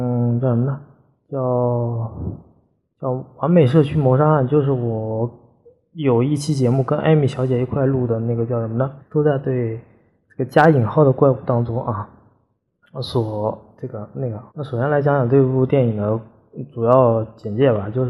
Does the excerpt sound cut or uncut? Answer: cut